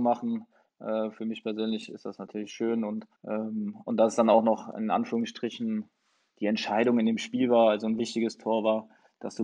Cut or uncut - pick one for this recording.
cut